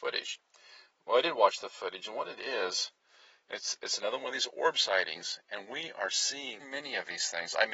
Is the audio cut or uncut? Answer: cut